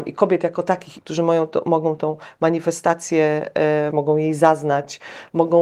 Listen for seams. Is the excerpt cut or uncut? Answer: cut